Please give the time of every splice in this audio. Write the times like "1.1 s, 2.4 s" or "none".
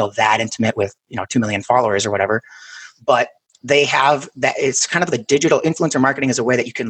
none